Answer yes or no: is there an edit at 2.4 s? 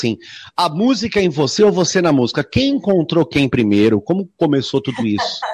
no